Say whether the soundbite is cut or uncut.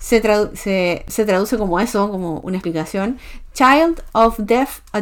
uncut